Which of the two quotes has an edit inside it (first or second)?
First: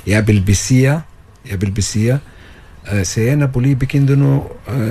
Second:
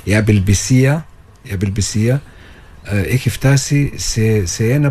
first